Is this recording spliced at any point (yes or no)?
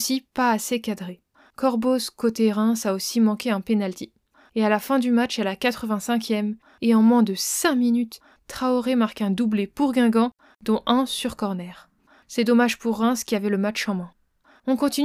no